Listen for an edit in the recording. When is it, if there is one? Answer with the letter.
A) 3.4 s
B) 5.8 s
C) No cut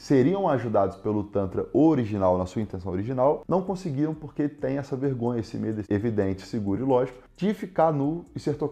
B